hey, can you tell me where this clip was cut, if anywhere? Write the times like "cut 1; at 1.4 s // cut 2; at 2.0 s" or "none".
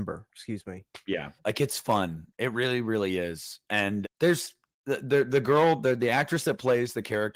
cut 1; at 1.4 s // cut 2; at 4.0 s